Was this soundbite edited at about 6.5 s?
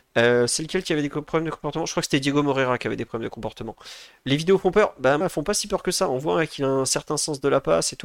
no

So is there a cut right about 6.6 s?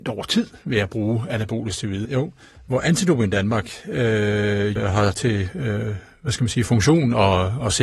no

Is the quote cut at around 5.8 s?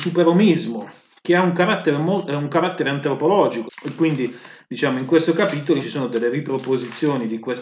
yes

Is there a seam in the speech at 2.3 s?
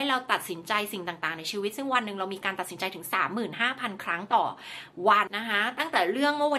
no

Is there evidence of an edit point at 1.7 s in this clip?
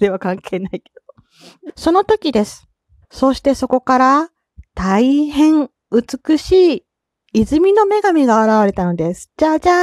yes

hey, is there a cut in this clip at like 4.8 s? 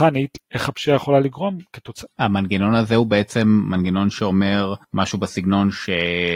yes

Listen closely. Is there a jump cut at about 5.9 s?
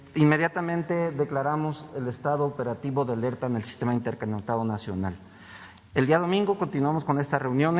yes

